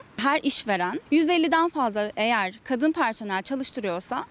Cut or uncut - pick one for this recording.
cut